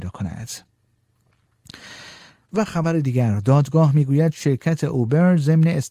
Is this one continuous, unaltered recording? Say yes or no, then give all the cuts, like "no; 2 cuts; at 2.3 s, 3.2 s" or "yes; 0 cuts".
yes; 0 cuts